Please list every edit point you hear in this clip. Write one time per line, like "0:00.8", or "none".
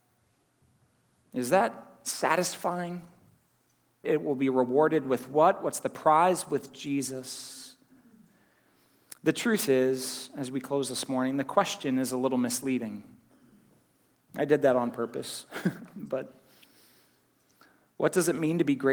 0:04.0